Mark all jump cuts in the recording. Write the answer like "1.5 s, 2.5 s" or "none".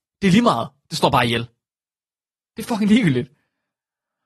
none